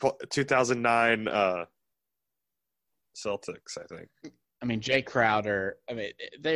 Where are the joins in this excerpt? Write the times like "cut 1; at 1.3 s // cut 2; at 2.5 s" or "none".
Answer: cut 1; at 4.5 s